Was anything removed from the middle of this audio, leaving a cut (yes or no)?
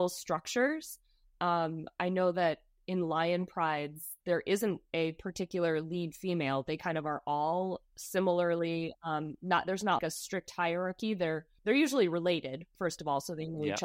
yes